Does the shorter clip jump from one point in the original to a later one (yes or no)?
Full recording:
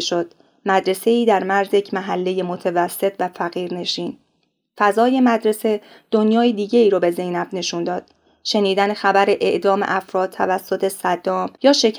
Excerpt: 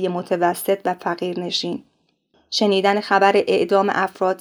yes